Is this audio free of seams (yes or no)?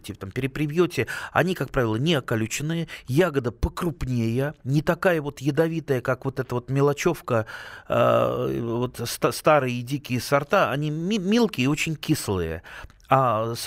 yes